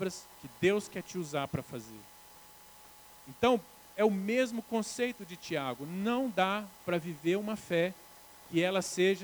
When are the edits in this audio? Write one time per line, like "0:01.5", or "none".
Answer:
none